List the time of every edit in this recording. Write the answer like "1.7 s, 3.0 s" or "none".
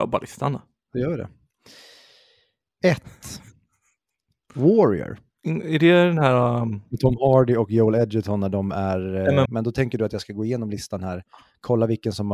9.5 s